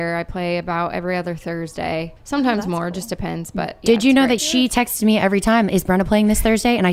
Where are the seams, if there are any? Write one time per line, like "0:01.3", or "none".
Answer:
0:02.2
0:04.4